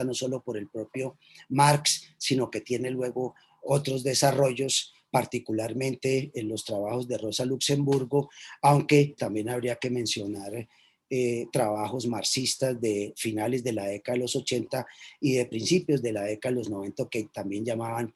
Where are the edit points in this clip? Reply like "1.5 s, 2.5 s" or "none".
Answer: 9.2 s

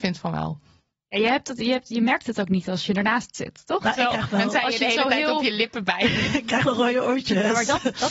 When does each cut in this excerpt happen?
none

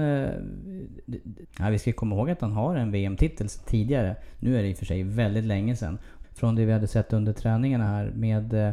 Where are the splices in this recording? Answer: 1.4 s, 6.2 s

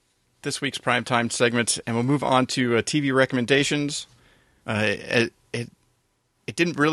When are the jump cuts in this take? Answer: 4.6 s

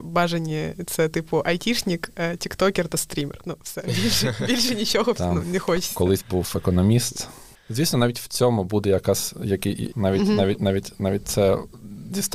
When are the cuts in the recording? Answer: 7.6 s, 9.9 s

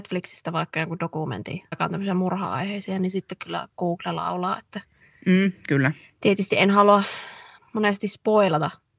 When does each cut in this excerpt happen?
1.7 s

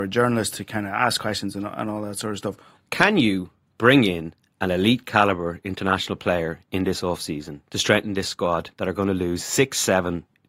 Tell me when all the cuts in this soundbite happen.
2.7 s

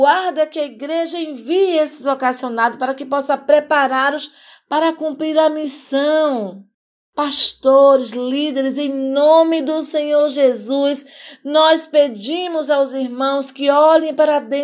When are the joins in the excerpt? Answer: none

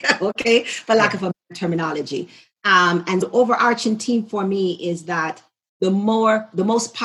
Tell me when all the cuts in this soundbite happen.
3.2 s

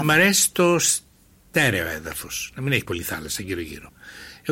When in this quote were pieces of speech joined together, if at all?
2.8 s

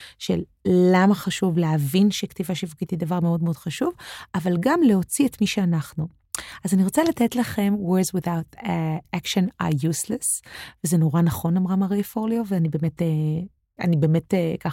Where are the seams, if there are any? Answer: 9.0 s, 13.8 s

